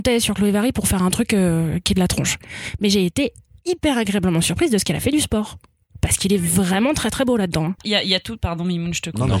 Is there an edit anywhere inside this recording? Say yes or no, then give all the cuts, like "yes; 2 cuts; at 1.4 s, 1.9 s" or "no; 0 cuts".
no; 0 cuts